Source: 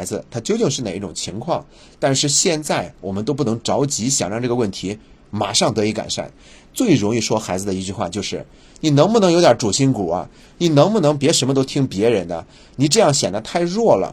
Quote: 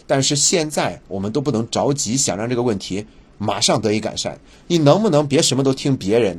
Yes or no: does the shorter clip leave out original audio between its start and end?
yes